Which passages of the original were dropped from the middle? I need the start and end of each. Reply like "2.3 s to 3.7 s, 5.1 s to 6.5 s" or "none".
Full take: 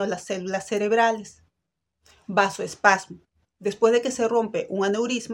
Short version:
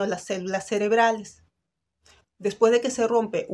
2.2 s to 3.4 s